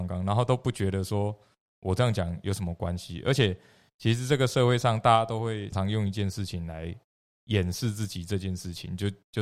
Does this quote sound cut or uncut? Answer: cut